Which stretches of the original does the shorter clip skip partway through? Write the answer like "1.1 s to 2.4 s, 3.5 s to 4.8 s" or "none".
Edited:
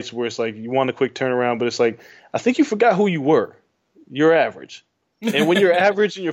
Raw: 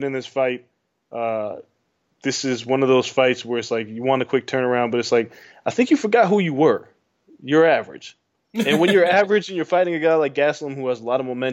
none